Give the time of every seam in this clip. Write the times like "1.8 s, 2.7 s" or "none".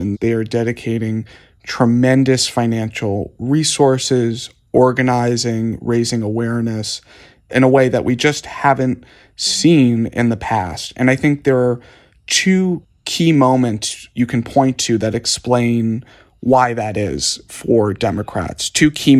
none